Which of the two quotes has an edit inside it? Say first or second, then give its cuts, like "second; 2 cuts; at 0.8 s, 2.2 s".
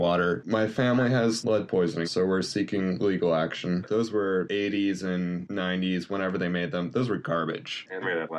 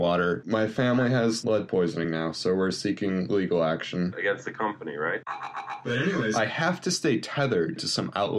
first; 2 cuts; at 2.0 s, 3.8 s